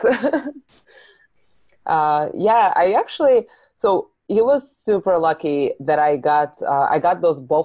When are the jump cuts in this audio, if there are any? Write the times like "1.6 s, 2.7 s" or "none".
none